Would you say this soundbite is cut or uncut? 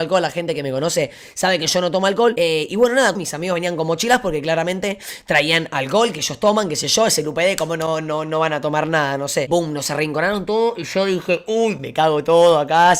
cut